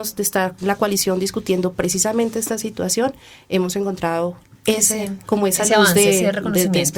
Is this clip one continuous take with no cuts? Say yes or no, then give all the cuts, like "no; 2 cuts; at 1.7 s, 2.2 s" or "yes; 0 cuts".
yes; 0 cuts